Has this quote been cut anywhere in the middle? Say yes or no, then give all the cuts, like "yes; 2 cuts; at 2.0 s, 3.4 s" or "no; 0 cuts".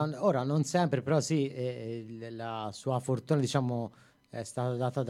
no; 0 cuts